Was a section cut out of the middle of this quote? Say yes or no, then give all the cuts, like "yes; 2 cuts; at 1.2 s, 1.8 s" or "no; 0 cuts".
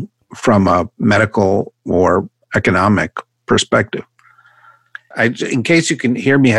yes; 1 cut; at 5.1 s